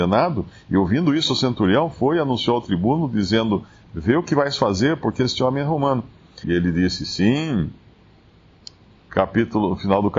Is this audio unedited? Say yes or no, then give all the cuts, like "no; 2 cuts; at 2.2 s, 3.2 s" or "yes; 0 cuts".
no; 2 cuts; at 6.4 s, 8.9 s